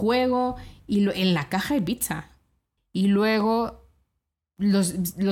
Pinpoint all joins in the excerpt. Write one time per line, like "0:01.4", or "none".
0:02.8